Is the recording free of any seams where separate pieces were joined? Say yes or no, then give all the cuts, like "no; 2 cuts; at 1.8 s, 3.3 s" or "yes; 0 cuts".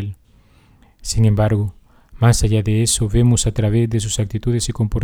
yes; 0 cuts